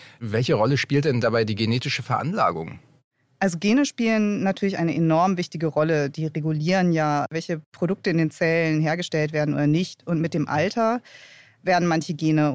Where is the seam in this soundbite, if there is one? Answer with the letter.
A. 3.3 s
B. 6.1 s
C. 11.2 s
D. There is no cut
D